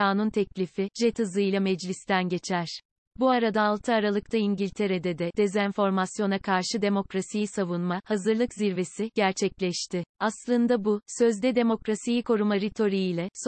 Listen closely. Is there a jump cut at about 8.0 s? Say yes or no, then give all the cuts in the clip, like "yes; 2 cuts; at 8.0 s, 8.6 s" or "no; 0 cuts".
no; 2 cuts; at 3.0 s, 10.1 s